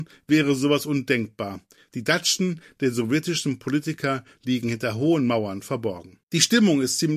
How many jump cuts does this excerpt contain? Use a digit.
1